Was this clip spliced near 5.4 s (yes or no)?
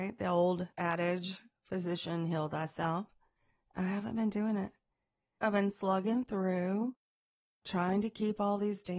yes